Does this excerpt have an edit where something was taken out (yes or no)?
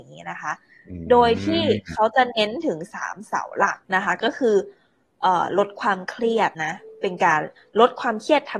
yes